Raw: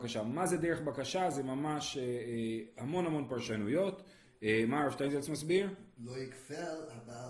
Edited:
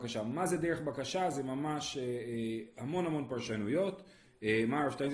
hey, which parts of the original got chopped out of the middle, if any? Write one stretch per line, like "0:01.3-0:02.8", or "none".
none